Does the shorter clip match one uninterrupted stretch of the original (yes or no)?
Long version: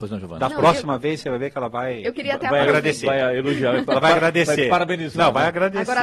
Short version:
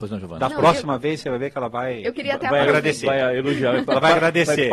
yes